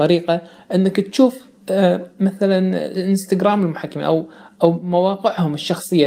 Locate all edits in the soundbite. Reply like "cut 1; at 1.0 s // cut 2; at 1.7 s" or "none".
none